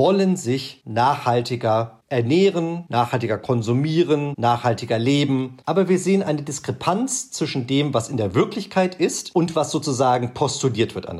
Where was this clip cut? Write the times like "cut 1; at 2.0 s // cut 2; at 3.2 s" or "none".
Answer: cut 1; at 5.6 s